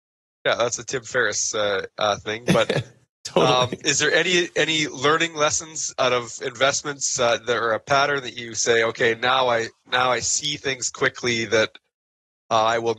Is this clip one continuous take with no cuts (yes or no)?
yes